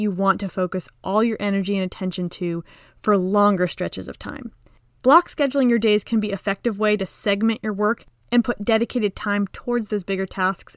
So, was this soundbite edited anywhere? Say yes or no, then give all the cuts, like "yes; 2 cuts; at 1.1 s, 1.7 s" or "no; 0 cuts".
yes; 2 cuts; at 5.0 s, 6.3 s